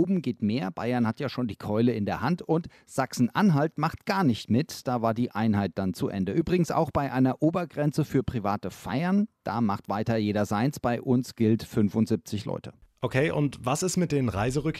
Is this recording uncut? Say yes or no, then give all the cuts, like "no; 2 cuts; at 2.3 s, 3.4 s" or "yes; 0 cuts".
yes; 0 cuts